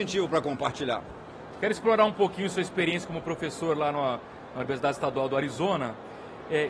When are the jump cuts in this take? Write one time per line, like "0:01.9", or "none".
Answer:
0:01.5